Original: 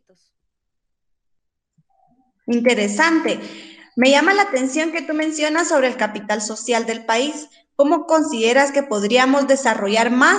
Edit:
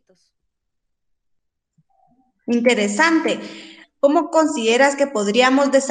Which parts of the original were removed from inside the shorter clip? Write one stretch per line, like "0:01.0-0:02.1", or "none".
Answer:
0:03.8-0:07.6